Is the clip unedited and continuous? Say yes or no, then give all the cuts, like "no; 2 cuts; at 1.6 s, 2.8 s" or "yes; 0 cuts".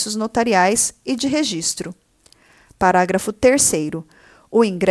yes; 0 cuts